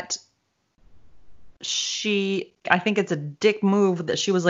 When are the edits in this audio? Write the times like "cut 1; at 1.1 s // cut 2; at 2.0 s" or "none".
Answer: cut 1; at 2.6 s